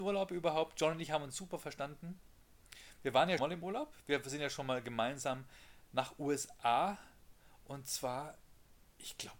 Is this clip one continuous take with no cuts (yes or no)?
no